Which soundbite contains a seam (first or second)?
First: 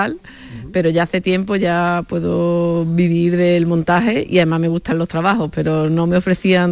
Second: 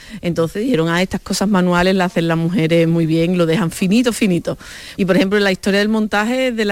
second